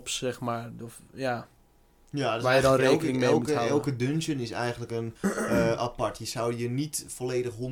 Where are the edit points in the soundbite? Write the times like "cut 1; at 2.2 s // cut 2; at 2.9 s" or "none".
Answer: none